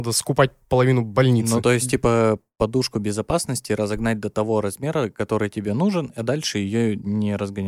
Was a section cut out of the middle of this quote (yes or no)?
no